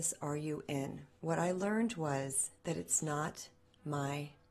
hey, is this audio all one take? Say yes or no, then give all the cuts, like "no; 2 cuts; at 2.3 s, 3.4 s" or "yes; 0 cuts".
no; 2 cuts; at 1.2 s, 2.6 s